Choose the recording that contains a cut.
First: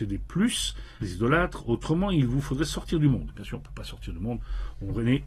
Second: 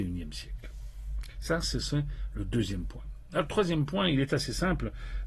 first; 1 cut; at 1.0 s

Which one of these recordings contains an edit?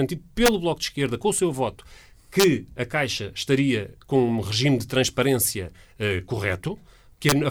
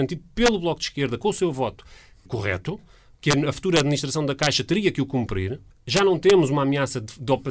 second; 2 cuts; at 2.3 s, 5.7 s

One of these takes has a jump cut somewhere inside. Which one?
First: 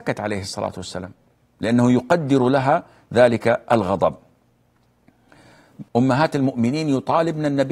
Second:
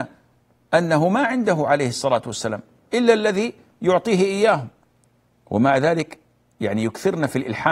first; 1 cut; at 5.9 s

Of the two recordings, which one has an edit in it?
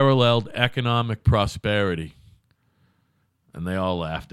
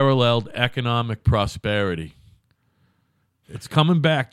second; 1 cut; at 3.4 s

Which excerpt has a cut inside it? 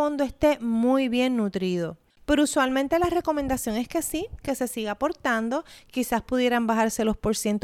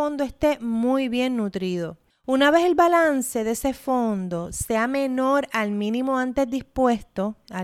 first; 1 cut; at 2.2 s

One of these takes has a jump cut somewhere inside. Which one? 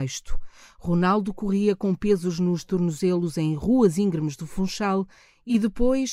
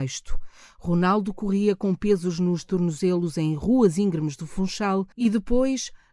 second; 1 cut; at 5.1 s

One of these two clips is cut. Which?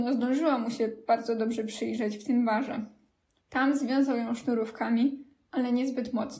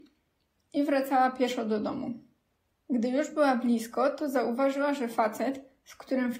first; 1 cut; at 3.5 s

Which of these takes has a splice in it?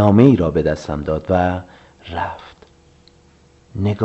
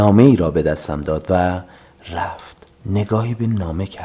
second; 1 cut; at 2.8 s

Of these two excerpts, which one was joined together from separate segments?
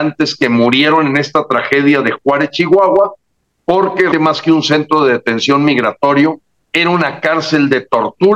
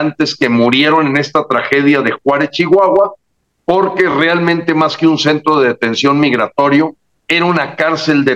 first; 1 cut; at 4.1 s

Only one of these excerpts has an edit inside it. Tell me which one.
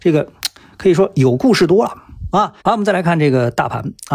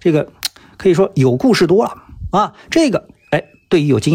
first; 1 cut; at 2.6 s

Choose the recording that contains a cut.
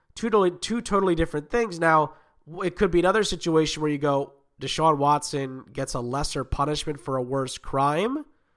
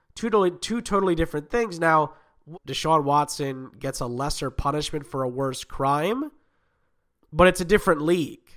second; 2 cuts; at 2.5 s, 7.2 s

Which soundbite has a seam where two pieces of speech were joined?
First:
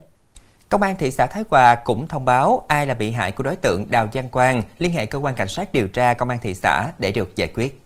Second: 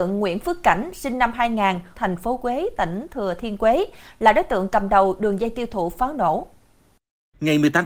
second; 1 cut; at 1.9 s

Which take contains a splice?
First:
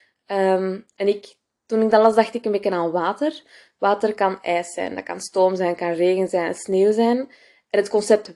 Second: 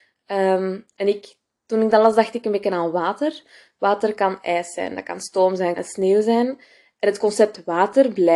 second; 1 cut; at 5.8 s

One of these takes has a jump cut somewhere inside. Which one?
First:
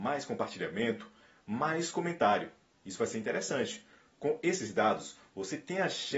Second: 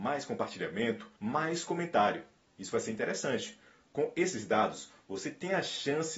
second; 1 cut; at 1.2 s

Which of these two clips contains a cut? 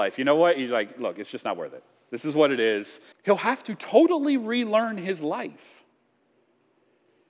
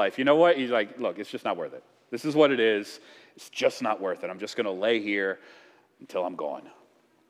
first; 1 cut; at 3.1 s

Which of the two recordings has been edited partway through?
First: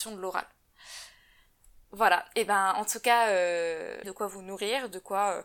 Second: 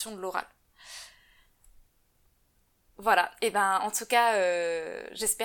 first; 2 cuts; at 1.8 s, 4.0 s

